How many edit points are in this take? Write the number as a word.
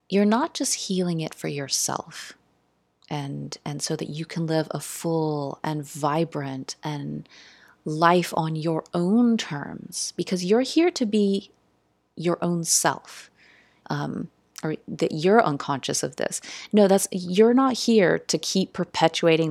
one